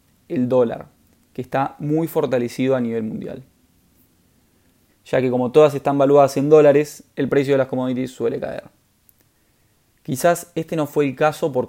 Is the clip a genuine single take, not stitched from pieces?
no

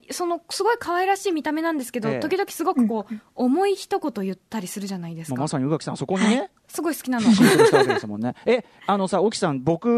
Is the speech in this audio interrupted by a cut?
no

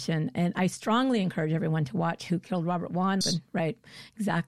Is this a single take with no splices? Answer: no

